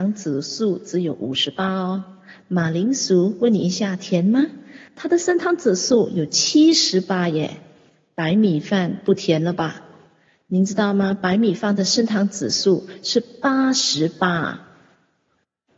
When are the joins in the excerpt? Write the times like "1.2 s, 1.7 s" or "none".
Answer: none